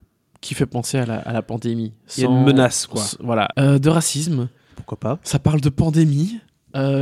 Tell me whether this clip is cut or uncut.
cut